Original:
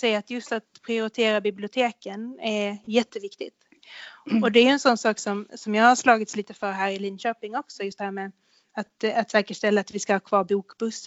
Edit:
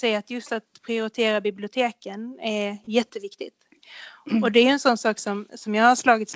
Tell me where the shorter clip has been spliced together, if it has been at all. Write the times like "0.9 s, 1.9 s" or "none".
none